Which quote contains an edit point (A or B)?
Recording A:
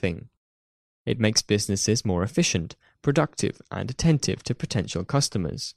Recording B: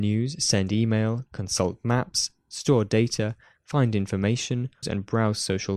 B